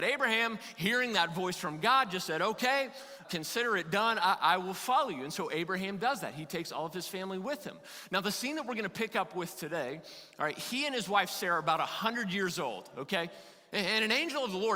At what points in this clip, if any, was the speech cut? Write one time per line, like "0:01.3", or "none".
0:03.2